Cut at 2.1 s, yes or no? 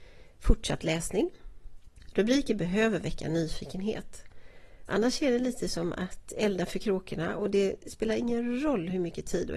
no